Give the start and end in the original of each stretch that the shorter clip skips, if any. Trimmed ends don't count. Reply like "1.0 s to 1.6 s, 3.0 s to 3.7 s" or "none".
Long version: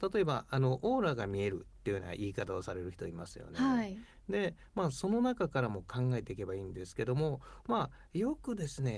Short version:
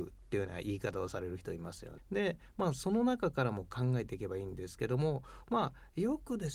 3.5 s to 4.1 s

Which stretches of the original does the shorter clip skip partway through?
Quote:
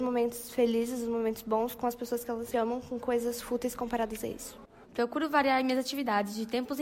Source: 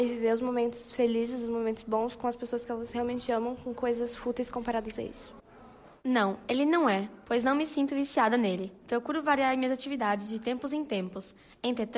2.9 s to 3.3 s, 5.6 s to 8.8 s

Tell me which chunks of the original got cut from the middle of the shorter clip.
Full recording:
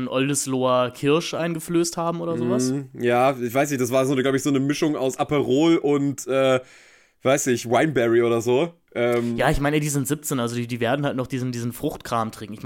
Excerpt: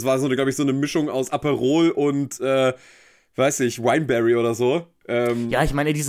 none

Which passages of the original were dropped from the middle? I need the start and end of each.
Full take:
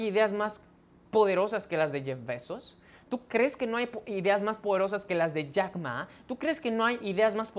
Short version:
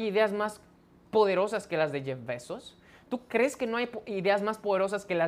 none

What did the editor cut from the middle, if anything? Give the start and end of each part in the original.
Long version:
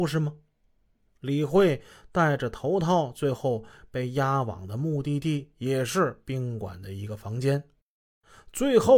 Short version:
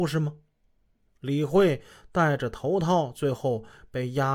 none

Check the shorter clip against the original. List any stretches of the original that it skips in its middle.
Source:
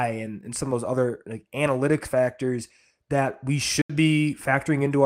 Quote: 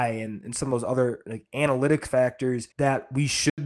2.7 s to 3.0 s

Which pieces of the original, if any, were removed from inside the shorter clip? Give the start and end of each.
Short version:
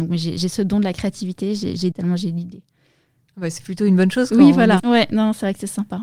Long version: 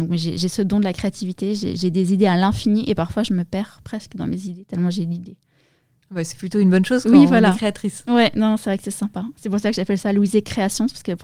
1.9 s to 4.7 s, 7.5 s to 8.0 s

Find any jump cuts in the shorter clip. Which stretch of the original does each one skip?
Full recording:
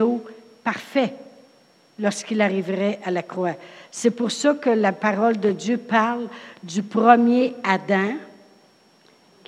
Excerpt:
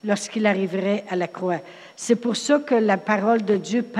none

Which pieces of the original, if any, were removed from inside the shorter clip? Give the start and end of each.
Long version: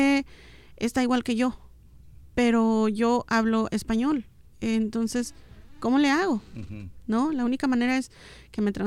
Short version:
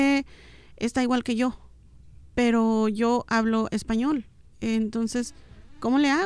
none

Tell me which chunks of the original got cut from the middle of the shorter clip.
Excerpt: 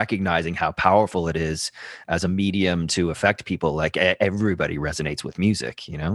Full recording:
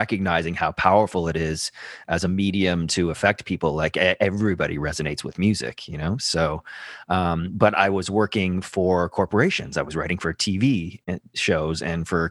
none

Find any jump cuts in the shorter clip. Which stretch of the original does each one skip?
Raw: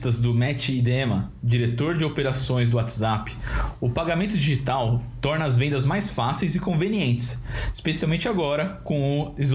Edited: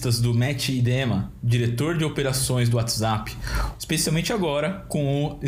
3.8 s to 7.7 s

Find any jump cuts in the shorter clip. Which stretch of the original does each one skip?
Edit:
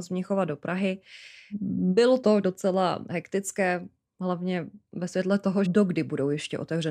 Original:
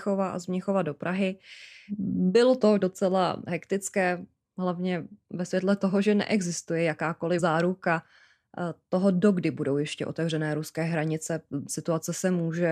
6.0 s to 9.1 s

